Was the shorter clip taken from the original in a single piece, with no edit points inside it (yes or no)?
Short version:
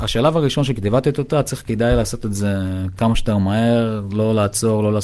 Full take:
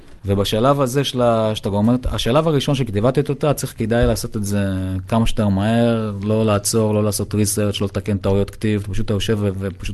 yes